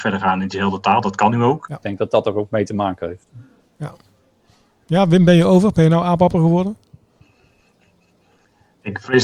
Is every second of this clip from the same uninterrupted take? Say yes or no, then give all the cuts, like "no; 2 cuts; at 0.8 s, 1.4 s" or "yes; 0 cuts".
no; 1 cut; at 1.7 s